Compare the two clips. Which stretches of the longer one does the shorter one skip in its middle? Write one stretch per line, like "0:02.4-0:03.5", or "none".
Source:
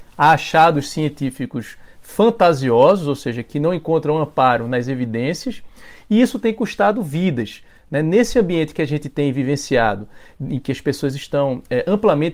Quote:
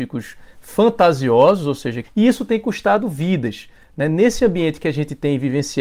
0:03.4-0:06.0